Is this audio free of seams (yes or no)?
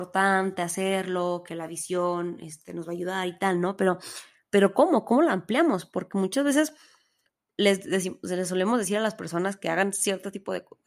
yes